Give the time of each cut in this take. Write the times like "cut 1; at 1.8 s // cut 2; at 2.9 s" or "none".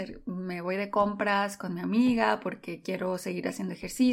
none